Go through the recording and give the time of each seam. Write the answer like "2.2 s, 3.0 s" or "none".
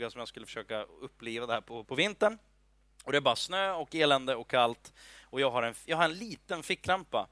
1.8 s